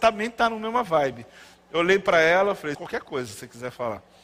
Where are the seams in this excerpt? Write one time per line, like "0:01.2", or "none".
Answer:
0:02.7